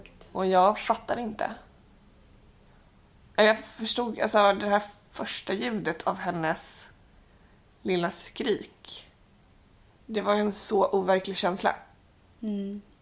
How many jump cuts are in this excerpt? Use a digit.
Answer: 1